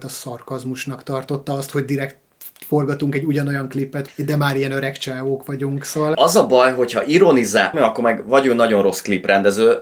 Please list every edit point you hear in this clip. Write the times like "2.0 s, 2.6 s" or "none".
4.1 s, 6.1 s, 7.7 s